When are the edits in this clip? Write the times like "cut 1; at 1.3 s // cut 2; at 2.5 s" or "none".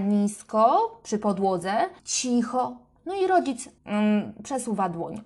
cut 1; at 2.0 s // cut 2; at 3.8 s